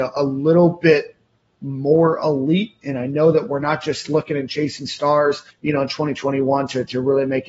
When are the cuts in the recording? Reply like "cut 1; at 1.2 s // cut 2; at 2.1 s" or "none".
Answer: cut 1; at 5.5 s